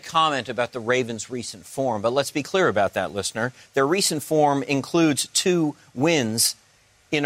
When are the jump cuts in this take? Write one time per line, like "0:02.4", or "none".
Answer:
none